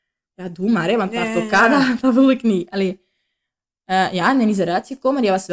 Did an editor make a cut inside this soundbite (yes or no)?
no